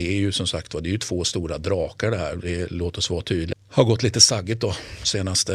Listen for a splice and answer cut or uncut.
cut